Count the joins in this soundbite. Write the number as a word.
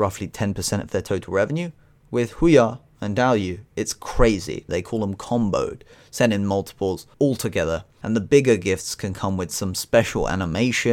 two